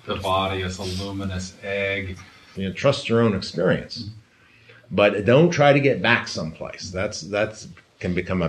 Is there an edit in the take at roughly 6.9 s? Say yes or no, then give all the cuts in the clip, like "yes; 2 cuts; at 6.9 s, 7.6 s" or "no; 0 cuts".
no; 1 cut; at 2.5 s